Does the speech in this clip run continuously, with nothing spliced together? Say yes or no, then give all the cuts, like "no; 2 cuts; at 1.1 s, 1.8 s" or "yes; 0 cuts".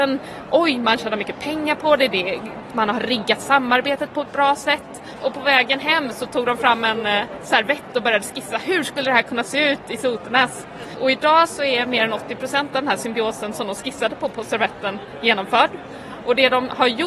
yes; 0 cuts